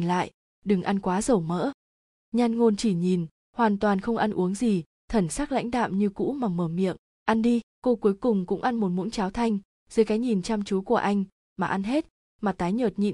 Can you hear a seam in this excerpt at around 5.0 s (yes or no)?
yes